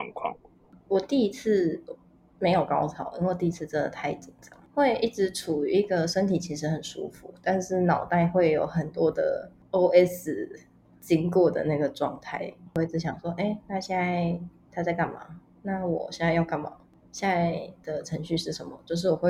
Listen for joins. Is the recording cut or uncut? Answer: uncut